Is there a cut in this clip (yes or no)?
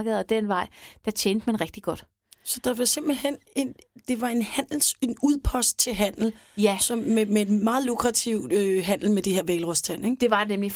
no